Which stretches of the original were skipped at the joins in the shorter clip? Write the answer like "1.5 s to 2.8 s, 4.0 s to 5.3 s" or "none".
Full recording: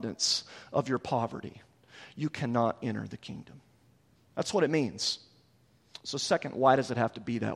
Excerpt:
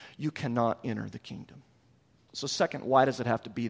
4.3 s to 6.0 s